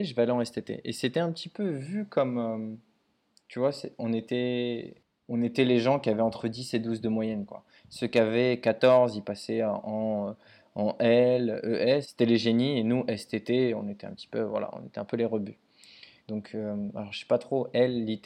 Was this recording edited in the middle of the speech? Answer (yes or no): yes